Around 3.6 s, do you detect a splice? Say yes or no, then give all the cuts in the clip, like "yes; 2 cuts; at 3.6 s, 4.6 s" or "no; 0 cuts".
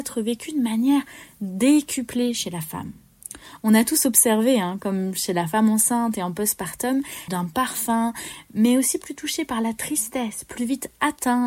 no; 1 cut; at 7.3 s